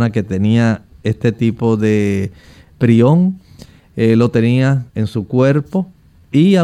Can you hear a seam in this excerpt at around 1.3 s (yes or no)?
no